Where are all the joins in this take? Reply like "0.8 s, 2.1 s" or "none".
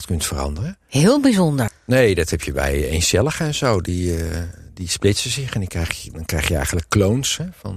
1.7 s